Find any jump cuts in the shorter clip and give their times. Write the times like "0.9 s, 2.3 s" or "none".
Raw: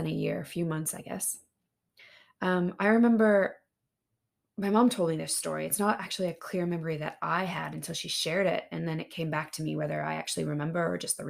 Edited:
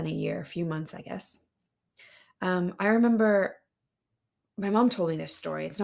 none